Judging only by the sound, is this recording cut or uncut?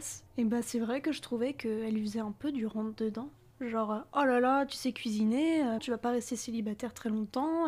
cut